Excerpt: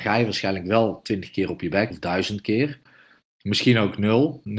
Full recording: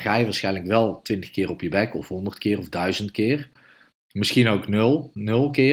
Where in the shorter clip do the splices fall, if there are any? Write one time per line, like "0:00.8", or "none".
0:01.9